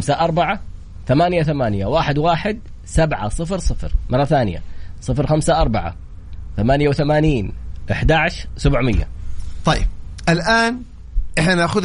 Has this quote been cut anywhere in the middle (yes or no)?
no